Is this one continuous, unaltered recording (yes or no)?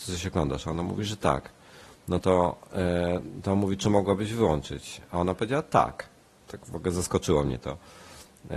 yes